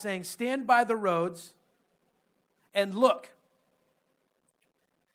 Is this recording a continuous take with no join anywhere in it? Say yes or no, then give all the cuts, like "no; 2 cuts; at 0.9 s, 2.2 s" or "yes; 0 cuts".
yes; 0 cuts